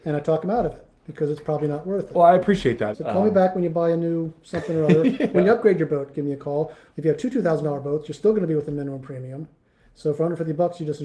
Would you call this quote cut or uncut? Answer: cut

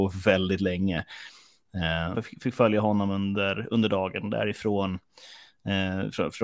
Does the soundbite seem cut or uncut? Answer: cut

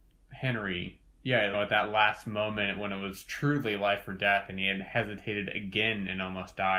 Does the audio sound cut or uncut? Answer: cut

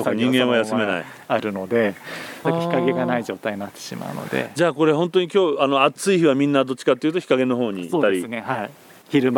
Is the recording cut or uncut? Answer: cut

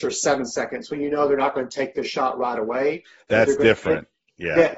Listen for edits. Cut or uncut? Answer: uncut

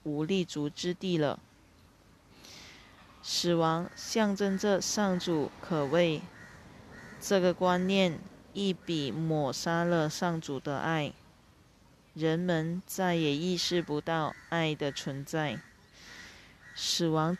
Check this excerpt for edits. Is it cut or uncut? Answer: uncut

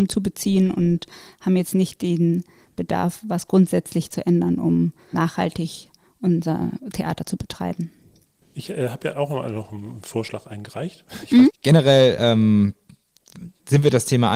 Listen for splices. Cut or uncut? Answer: cut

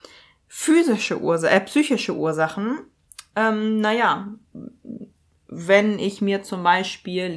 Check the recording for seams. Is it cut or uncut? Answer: uncut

